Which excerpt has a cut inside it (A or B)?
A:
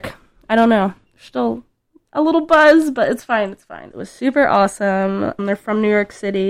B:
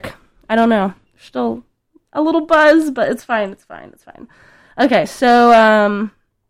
A